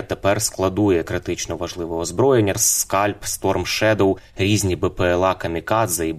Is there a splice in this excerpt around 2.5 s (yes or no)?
yes